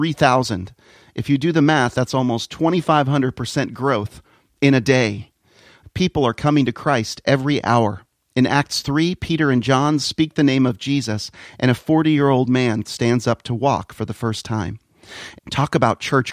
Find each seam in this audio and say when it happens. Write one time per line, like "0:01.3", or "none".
0:05.8
0:12.8
0:15.4